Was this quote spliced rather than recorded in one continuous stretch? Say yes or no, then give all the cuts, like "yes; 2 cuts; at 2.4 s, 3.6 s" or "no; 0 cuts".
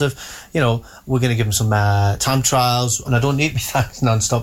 yes; 1 cut; at 3.0 s